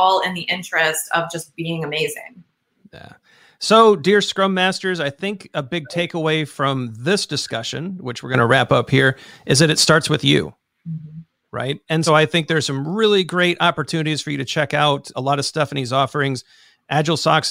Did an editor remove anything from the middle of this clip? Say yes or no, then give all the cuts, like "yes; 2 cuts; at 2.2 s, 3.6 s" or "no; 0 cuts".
yes; 2 cuts; at 12.1 s, 15.1 s